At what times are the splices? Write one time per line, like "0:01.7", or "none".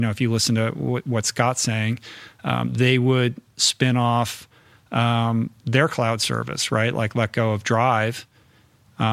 none